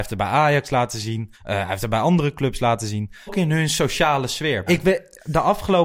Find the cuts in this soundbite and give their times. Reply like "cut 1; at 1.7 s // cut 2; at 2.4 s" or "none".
cut 1; at 1.3 s // cut 2; at 3.3 s // cut 3; at 4.7 s